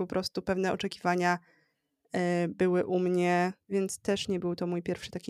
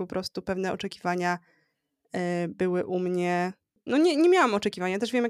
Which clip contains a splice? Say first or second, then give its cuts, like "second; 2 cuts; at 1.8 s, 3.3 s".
first; 1 cut; at 3.7 s